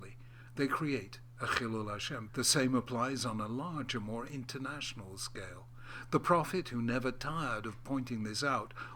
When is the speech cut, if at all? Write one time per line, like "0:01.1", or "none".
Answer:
0:02.3